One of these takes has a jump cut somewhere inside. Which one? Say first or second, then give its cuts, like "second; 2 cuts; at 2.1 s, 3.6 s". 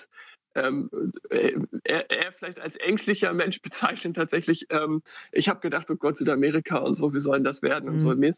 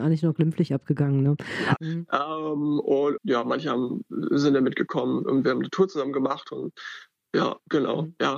second; 2 cuts; at 1.8 s, 3.2 s